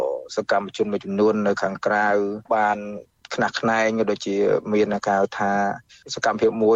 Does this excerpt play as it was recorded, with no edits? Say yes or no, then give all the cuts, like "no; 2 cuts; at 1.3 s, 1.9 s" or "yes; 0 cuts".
no; 1 cut; at 2.4 s